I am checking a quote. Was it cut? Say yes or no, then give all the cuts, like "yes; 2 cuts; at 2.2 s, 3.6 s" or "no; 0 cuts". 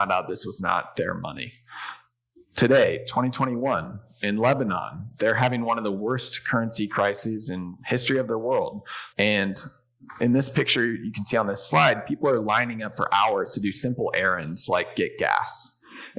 yes; 1 cut; at 9.1 s